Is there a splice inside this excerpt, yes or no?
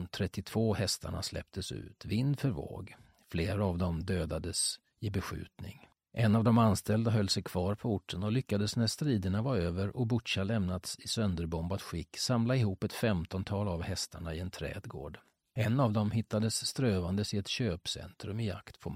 no